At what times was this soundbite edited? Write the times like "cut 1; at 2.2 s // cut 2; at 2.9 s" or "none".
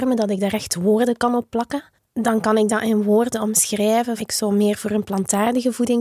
cut 1; at 2.0 s // cut 2; at 4.2 s